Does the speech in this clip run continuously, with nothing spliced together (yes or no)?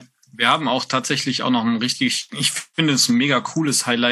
no